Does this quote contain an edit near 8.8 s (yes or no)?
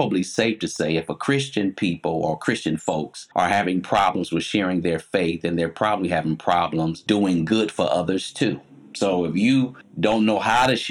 no